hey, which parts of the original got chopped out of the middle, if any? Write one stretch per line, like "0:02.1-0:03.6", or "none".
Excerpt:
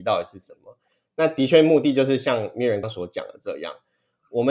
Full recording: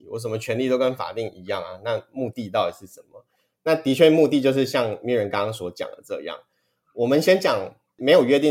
0:05.3-0:05.5